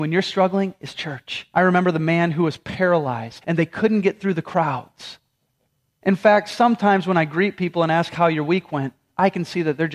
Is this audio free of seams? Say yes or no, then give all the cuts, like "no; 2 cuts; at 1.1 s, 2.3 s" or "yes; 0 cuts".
no; 3 cuts; at 1.5 s, 3.4 s, 6.0 s